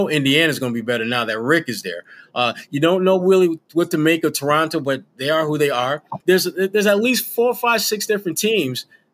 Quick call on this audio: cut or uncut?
cut